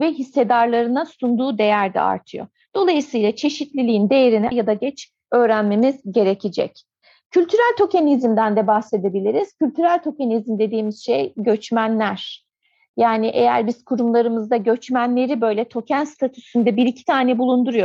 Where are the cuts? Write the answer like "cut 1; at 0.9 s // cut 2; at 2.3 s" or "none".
cut 1; at 4.5 s